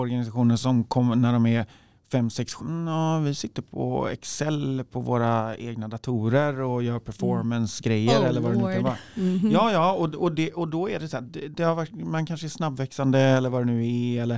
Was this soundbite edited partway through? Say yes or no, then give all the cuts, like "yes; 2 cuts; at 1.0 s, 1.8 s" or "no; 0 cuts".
yes; 1 cut; at 2.6 s